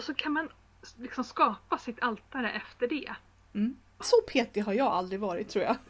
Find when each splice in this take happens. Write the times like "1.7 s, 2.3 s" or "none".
4.0 s